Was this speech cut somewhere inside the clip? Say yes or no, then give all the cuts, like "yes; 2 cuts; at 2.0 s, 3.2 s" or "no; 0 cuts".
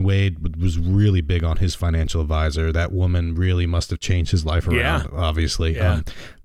no; 0 cuts